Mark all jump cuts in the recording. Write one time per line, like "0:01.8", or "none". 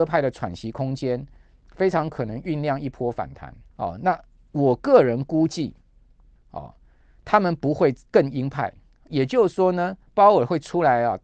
0:03.7
0:06.4